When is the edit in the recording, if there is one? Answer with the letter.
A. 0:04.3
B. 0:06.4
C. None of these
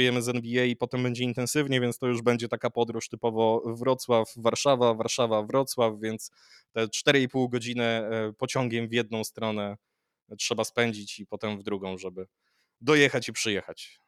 C